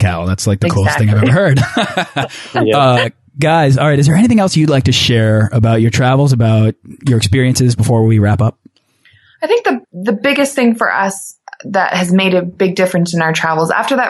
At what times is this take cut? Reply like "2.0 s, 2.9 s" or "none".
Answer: 9.8 s